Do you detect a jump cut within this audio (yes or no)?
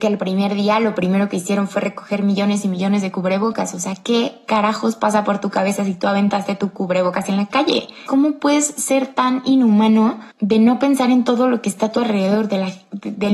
yes